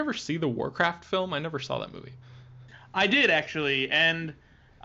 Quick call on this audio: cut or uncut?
uncut